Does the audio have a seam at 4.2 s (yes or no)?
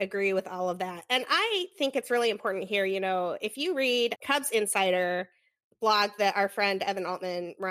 yes